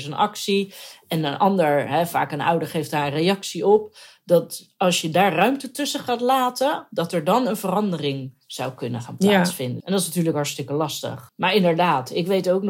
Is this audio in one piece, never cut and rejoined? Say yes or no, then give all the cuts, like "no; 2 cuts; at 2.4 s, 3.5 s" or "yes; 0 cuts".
no; 2 cuts; at 9.8 s, 11.3 s